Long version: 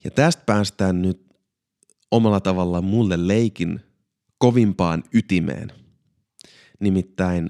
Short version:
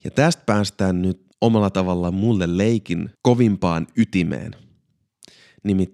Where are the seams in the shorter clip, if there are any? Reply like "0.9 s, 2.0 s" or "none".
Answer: 1.3 s, 3.1 s